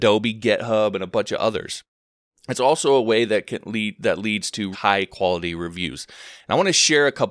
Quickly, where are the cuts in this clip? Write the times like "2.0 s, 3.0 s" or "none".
4.7 s